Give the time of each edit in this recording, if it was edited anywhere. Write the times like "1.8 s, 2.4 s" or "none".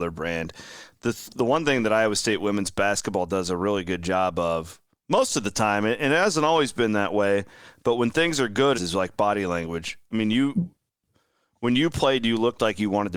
8.7 s